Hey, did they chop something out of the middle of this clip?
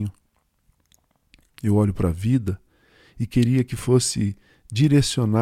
no; 0 cuts

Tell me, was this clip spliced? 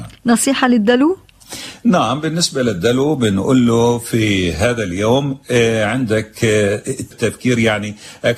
yes; 1 cut; at 7.1 s

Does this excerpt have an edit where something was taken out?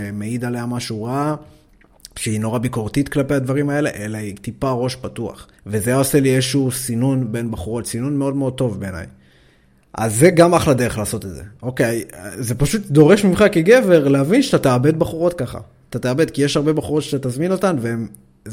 yes; 1 cut; at 5.6 s

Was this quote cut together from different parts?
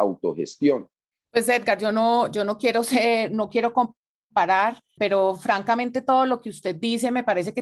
yes; 2 cuts; at 1.1 s, 5.0 s

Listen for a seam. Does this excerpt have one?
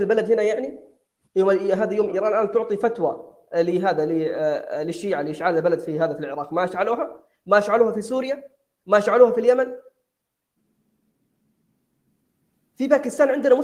yes; 1 cut; at 2.1 s

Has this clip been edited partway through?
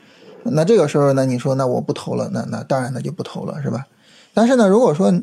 no; 0 cuts

